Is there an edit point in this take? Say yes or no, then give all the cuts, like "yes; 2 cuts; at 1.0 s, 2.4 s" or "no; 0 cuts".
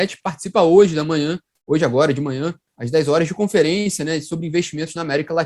no; 0 cuts